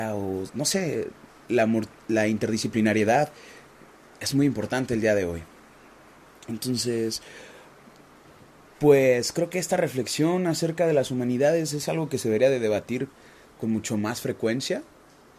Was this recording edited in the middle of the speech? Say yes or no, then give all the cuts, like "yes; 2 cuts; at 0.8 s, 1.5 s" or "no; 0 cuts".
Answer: no; 0 cuts